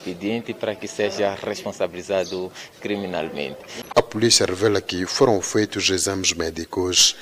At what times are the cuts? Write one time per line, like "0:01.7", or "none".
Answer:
0:03.9